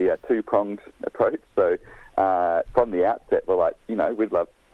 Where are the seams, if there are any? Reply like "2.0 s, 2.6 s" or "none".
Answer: 2.7 s, 3.8 s